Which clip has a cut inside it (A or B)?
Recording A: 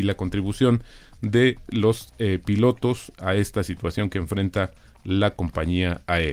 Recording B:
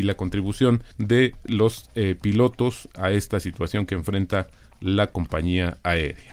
B